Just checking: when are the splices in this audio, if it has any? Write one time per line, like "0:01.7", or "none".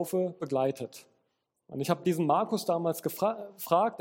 none